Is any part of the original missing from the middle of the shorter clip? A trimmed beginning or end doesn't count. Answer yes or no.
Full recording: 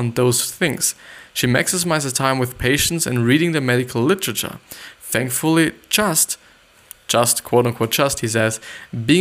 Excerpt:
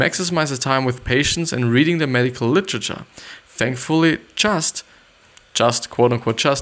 no